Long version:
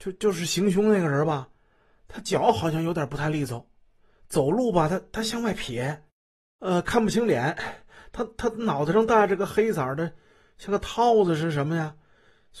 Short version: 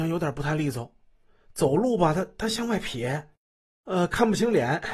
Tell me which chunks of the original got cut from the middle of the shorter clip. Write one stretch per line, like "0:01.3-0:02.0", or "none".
none